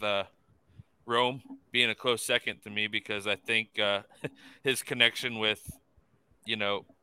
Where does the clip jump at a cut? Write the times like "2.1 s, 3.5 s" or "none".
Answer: none